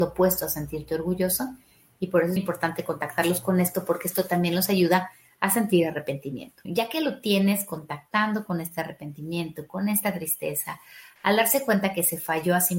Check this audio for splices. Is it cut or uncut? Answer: cut